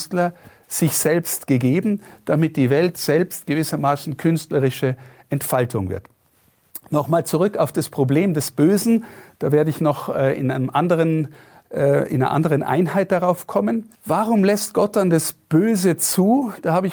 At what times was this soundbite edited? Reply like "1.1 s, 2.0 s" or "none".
13.9 s